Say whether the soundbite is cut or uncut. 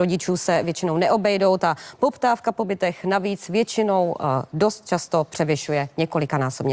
uncut